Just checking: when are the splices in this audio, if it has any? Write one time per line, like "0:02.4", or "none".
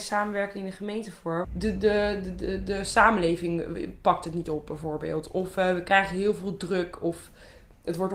0:01.4

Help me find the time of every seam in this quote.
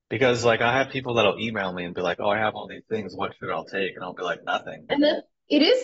0:04.9

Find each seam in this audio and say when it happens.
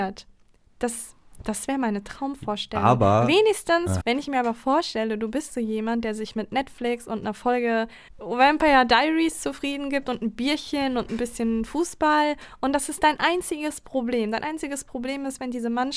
0:04.0
0:08.1

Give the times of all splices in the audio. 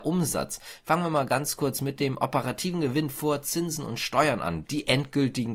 0:04.6

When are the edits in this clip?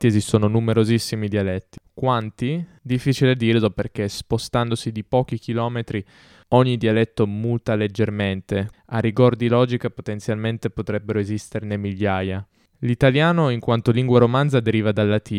0:08.7

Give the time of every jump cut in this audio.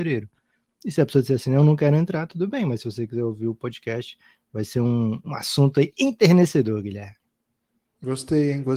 none

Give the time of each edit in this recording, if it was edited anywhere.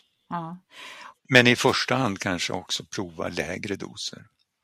0:01.1

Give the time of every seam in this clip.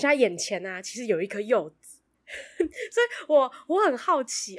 none

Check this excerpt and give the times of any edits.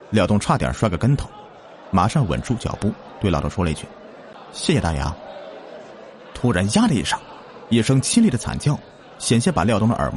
none

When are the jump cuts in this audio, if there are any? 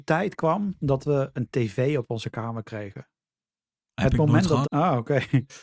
0:04.6

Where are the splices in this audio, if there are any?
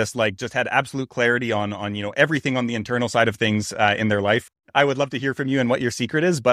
0:04.5

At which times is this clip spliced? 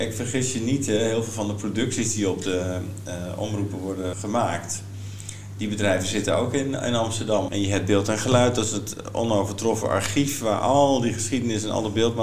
0:04.1
0:07.5

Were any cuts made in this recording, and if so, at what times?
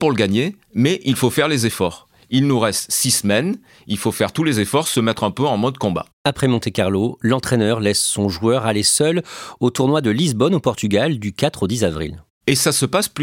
none

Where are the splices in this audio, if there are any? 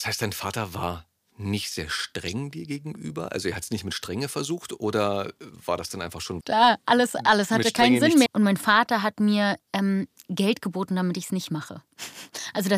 0:06.4
0:08.3

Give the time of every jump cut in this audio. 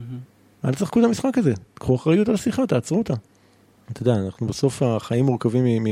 0:03.9

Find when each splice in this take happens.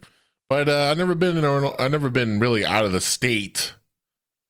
none

